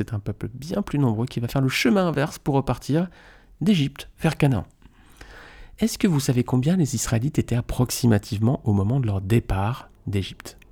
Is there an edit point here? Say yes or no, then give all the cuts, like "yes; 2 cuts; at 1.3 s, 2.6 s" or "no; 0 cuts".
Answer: no; 0 cuts